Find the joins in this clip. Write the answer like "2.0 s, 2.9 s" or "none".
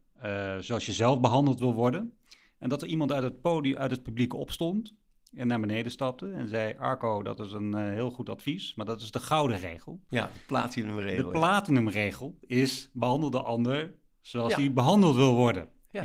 none